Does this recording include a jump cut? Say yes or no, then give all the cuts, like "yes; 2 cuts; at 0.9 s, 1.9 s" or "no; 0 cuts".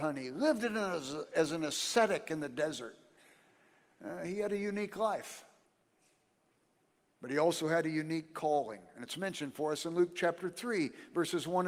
no; 0 cuts